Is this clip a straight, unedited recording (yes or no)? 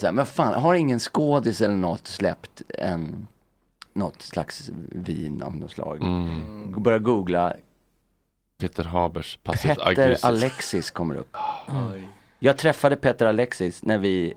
yes